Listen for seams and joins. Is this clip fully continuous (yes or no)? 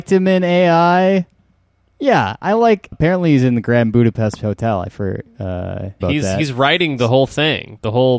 no